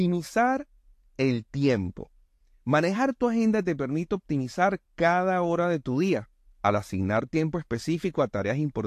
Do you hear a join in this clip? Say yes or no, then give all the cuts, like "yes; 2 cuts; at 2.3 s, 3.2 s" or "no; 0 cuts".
no; 0 cuts